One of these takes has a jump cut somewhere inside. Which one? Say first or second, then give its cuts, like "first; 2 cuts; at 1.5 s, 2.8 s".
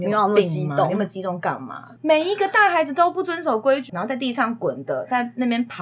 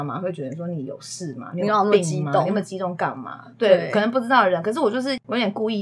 first; 2 cuts; at 2.0 s, 3.9 s